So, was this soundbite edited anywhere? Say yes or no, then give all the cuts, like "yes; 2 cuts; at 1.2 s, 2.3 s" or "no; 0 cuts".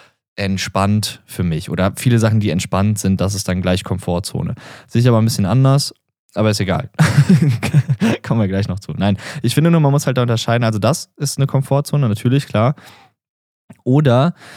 no; 0 cuts